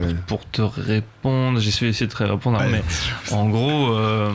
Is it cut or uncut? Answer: cut